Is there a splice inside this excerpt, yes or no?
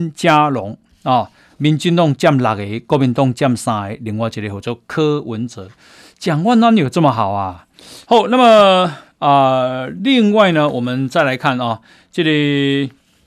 yes